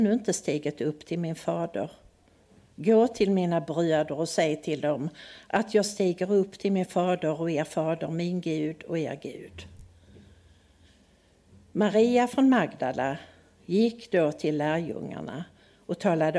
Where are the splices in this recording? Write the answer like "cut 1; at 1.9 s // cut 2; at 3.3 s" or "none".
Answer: none